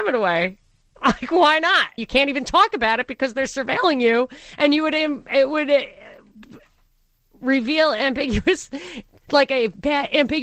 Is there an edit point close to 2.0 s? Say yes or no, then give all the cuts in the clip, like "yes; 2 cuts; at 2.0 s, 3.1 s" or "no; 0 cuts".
yes; 1 cut; at 2.0 s